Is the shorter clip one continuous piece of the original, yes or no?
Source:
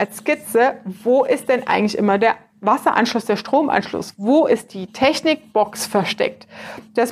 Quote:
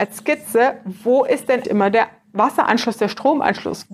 no